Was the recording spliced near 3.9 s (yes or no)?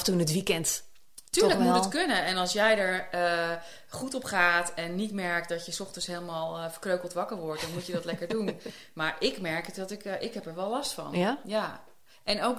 no